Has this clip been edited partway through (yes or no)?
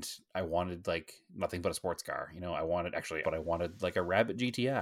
yes